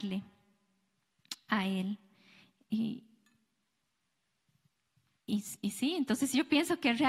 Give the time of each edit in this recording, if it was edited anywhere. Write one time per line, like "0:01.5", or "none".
none